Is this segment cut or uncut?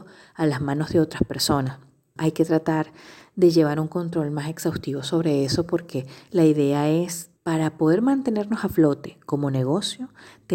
cut